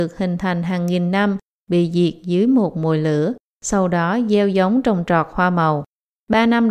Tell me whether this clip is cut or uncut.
uncut